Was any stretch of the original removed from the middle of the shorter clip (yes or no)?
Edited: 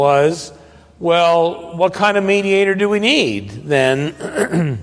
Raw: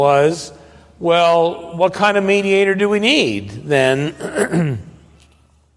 no